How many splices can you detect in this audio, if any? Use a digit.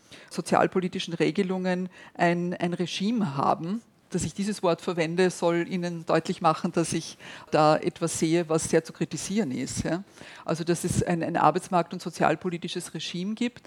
0